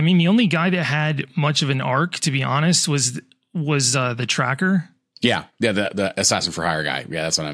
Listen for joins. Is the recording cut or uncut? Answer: uncut